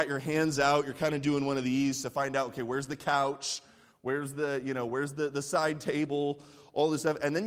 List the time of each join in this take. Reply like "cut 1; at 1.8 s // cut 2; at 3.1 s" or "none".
none